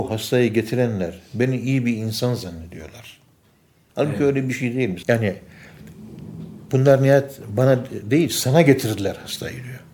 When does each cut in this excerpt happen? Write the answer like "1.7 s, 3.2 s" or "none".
3.9 s, 5.0 s